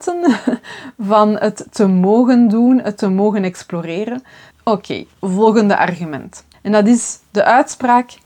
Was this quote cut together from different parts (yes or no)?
yes